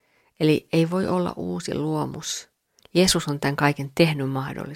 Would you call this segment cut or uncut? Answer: cut